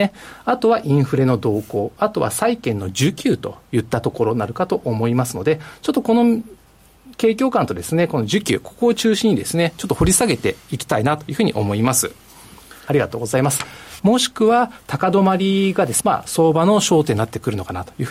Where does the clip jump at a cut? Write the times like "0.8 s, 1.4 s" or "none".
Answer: 12.9 s, 14.0 s, 16.0 s

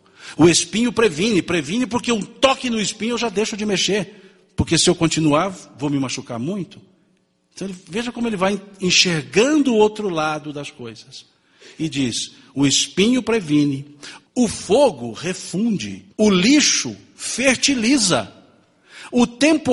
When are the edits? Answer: 14.3 s, 16.1 s

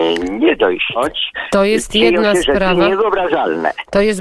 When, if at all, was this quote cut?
1.0 s

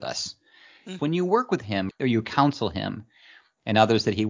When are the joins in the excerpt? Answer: 1.0 s

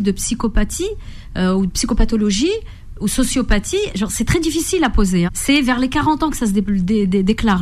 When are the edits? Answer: 5.3 s

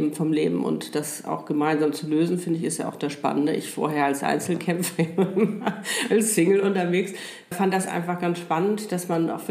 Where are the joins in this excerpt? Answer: 7.5 s

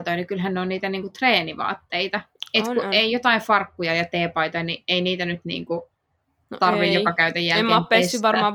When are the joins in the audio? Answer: none

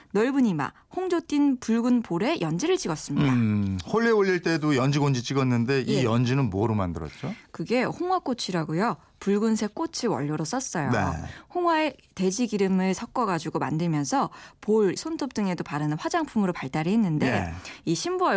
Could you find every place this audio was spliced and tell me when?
15.0 s

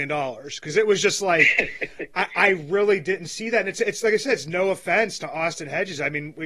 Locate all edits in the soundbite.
none

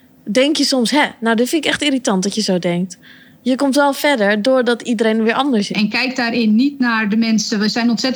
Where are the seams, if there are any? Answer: 5.7 s

